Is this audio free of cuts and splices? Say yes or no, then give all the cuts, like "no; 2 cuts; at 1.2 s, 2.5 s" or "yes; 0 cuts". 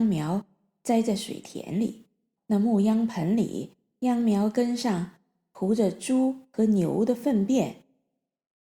no; 1 cut; at 2.4 s